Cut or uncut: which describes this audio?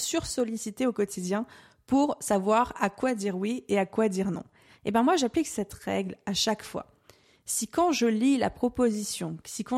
uncut